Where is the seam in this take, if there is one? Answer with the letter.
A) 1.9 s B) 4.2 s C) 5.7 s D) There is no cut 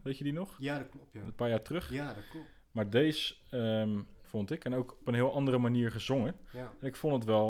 B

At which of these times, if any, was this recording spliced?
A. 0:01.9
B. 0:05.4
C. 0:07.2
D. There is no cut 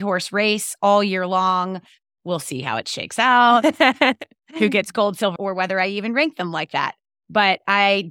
B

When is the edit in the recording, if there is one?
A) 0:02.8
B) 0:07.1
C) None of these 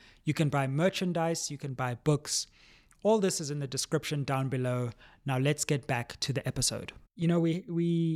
B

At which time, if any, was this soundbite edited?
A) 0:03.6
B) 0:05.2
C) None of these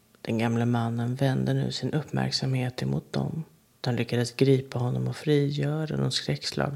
A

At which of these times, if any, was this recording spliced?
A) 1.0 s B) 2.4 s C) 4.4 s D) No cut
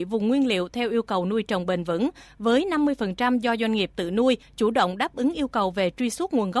C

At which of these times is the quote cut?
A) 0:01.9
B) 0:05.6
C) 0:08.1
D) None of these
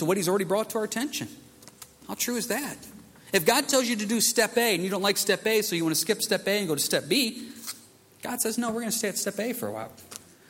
D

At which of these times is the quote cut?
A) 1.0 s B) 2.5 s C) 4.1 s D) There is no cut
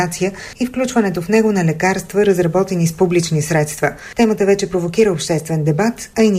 D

